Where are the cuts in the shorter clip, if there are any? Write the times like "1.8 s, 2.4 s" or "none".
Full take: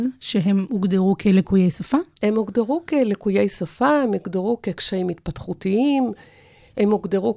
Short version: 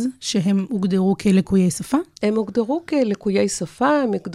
none